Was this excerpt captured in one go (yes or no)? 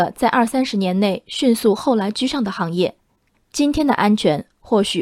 yes